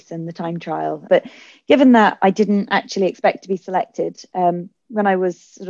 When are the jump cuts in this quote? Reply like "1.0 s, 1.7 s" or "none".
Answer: 1.1 s

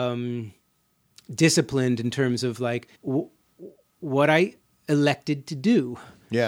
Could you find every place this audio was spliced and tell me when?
2.9 s

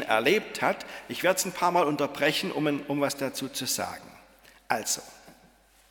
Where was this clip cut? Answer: none

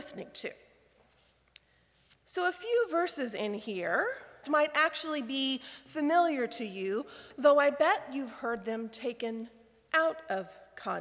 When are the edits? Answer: 4.4 s

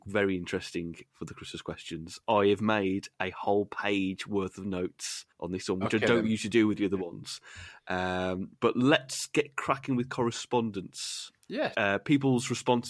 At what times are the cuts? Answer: 5.3 s, 11.7 s

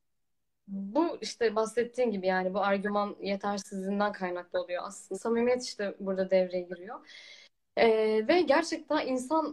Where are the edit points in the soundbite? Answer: 5.1 s

